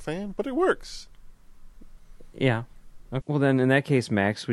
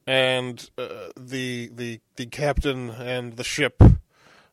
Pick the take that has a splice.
first; 1 cut; at 3.2 s

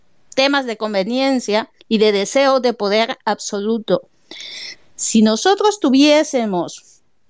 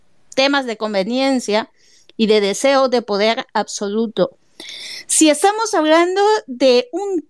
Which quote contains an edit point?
first; 2 cuts; at 1.8 s, 4.7 s

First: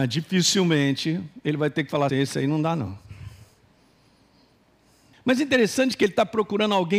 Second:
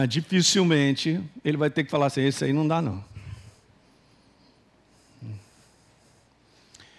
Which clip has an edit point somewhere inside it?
first; 2 cuts; at 2.1 s, 5.1 s

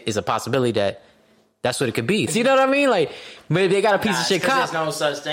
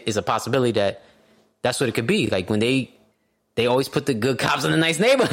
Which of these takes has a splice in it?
first; 1 cut; at 2.3 s

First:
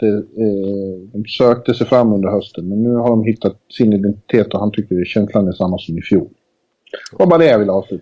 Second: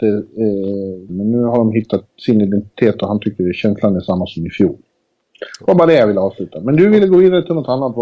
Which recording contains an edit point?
second; 1 cut; at 1.1 s

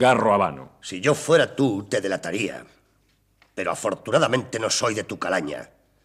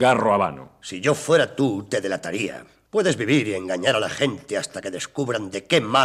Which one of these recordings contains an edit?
second; 1 cut; at 2.9 s

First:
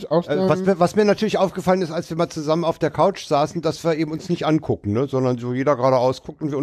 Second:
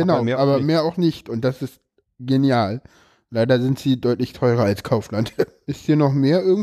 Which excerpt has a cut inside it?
second; 1 cut; at 5.6 s

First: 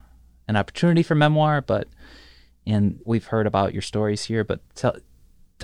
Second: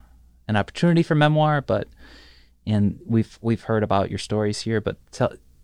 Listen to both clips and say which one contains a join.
first; 1 cut; at 3.0 s

